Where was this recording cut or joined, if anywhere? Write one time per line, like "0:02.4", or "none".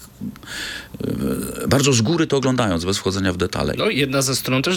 0:03.7